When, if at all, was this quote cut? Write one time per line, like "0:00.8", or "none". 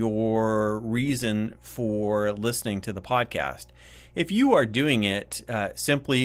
none